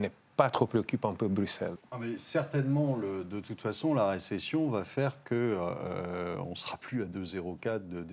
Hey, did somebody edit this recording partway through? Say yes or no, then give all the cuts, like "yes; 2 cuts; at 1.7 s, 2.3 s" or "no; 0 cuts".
yes; 1 cut; at 1.7 s